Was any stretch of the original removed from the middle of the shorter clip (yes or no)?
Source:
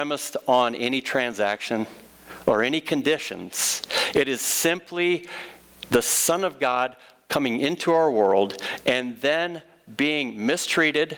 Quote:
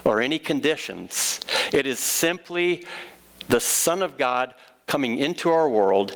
no